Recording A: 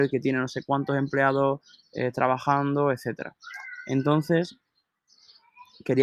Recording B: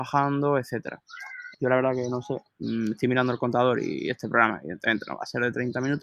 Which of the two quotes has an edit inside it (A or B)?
B